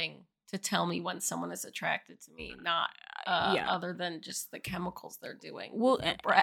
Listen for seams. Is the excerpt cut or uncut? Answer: uncut